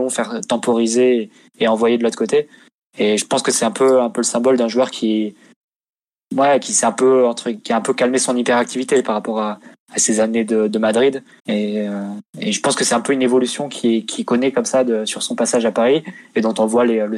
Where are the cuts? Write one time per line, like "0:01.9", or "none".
0:11.4